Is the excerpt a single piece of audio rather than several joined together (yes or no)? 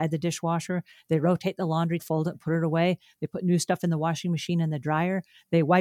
no